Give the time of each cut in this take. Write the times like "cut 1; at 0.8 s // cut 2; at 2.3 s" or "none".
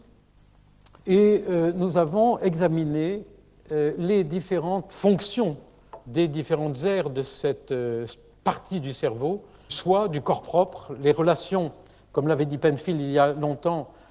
cut 1; at 1.0 s // cut 2; at 9.7 s